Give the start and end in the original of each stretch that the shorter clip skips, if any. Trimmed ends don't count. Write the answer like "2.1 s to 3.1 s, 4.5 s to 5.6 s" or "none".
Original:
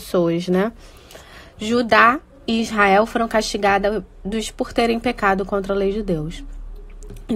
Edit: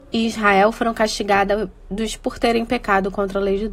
none